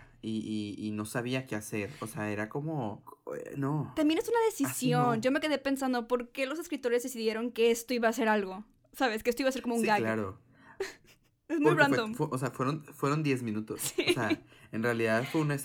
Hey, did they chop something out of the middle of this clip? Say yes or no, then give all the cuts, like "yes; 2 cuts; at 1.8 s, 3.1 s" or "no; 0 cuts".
no; 0 cuts